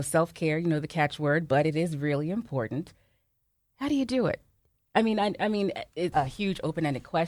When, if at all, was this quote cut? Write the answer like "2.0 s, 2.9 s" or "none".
6.1 s